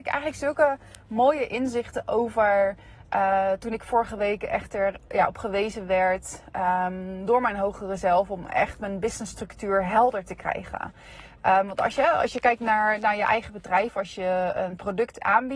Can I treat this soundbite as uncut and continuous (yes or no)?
yes